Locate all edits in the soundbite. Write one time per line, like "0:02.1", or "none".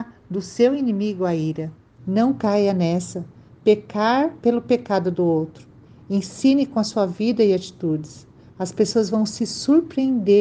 0:02.0